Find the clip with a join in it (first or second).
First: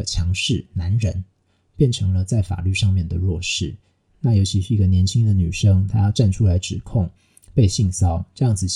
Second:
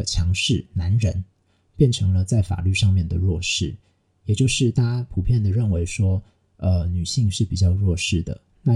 first